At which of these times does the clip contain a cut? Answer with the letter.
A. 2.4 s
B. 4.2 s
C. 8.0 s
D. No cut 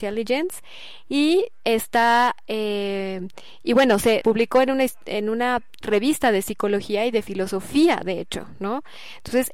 B